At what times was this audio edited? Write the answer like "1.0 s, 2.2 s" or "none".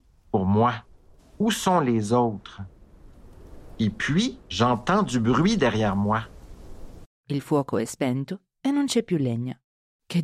1.2 s, 4.4 s, 7.0 s